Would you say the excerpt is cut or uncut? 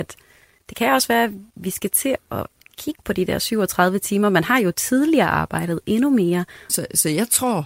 cut